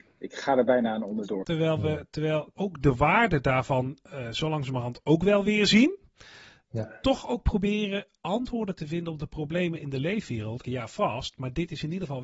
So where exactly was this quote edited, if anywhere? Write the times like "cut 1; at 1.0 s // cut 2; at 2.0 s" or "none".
cut 1; at 1.4 s // cut 2; at 2.5 s // cut 3; at 10.6 s